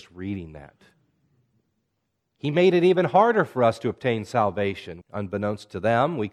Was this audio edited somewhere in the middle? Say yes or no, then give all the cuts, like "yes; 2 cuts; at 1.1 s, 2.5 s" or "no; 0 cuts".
yes; 2 cuts; at 2.2 s, 5.0 s